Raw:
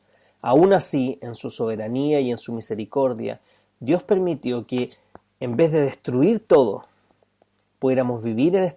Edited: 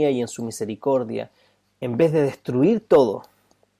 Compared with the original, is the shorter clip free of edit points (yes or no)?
no